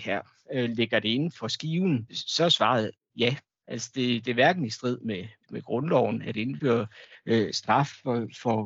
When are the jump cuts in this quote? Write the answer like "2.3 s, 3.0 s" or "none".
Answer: none